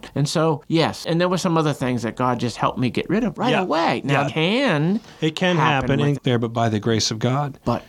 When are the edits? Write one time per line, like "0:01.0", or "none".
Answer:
0:04.3
0:06.2